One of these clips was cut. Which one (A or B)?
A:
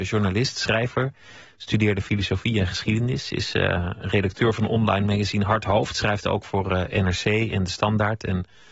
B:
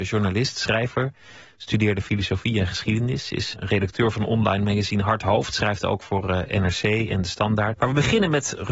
B